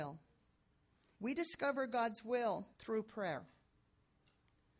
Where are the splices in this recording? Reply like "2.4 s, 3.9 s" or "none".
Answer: 1.1 s, 2.7 s